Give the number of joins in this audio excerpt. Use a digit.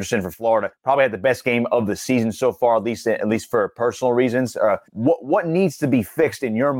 1